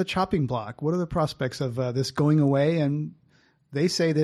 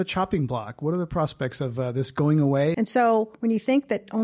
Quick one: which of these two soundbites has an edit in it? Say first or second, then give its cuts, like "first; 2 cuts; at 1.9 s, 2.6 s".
second; 1 cut; at 2.7 s